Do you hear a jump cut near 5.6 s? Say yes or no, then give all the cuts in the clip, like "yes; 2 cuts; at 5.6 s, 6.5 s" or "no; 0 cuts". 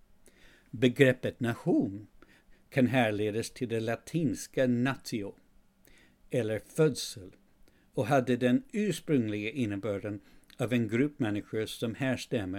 no; 0 cuts